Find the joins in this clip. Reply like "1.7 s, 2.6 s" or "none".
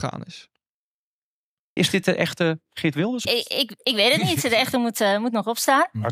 1.8 s, 3.2 s

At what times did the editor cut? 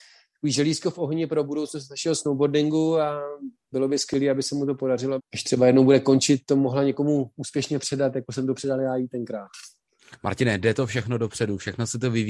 5.2 s

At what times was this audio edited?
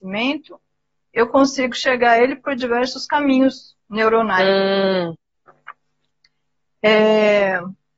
3.8 s

